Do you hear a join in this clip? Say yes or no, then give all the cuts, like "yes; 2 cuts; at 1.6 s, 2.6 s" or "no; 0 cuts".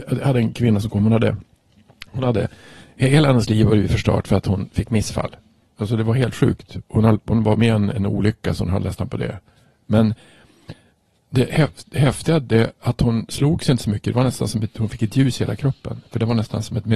yes; 1 cut; at 5.7 s